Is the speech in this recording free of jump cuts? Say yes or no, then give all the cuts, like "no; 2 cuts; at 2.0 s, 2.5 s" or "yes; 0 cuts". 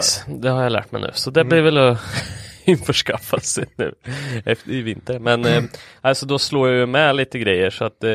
yes; 0 cuts